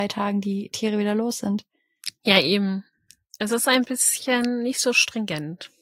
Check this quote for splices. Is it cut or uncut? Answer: uncut